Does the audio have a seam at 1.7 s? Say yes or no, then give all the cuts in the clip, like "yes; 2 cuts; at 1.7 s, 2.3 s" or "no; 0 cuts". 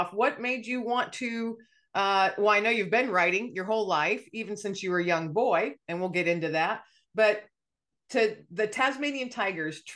no; 0 cuts